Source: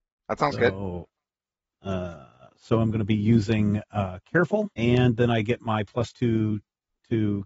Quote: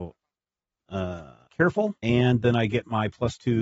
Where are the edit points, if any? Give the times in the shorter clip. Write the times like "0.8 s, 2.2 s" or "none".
1.5 s